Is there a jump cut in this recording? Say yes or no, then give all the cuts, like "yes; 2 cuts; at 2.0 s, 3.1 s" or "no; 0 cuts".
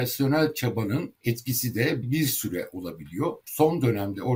yes; 2 cuts; at 2.0 s, 3.4 s